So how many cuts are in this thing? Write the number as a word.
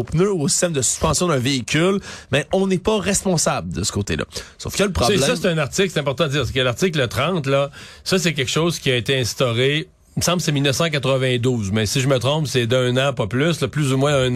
zero